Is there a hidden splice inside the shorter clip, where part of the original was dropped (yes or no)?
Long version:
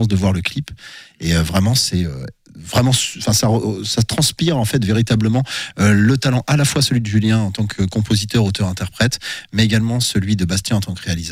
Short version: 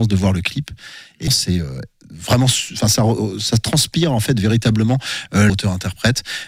yes